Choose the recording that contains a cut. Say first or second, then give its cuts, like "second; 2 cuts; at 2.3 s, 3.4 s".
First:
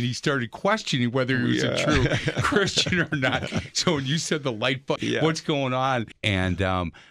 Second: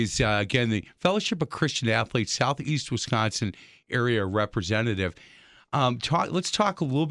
first; 2 cuts; at 5.0 s, 6.1 s